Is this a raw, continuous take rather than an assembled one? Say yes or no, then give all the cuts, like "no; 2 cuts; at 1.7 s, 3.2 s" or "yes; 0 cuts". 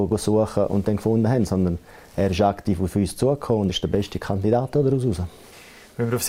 no; 1 cut; at 3.7 s